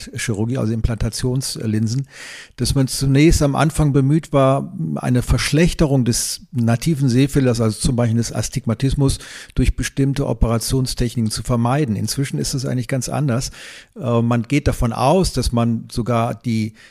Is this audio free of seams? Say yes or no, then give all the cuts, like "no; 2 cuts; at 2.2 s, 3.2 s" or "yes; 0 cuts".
yes; 0 cuts